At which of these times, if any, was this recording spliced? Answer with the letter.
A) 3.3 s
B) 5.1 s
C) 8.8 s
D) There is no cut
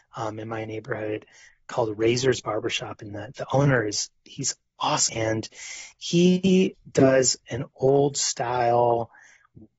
B